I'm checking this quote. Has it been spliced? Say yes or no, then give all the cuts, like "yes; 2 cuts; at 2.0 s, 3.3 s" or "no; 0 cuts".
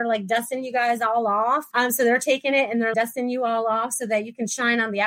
yes; 2 cuts; at 1.7 s, 2.9 s